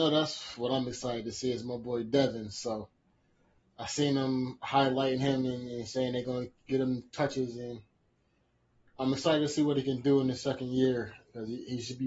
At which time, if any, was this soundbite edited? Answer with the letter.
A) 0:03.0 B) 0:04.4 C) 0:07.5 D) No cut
D